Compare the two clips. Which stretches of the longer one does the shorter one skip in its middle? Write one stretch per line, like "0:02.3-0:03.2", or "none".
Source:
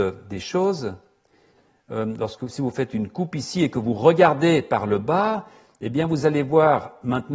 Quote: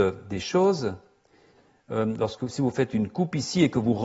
none